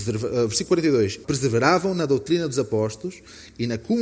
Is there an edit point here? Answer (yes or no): yes